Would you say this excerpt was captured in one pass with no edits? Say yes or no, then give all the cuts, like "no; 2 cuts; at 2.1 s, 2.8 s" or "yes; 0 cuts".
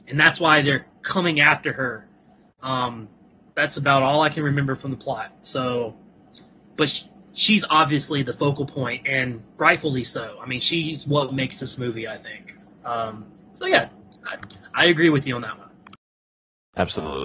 yes; 0 cuts